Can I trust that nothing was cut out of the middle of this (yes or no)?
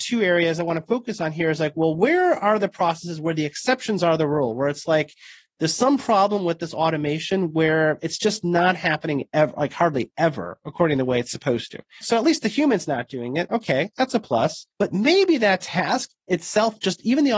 no